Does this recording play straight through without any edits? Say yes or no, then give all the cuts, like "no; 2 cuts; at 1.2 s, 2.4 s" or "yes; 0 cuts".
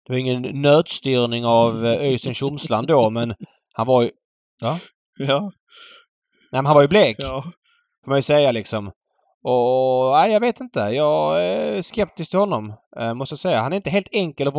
yes; 0 cuts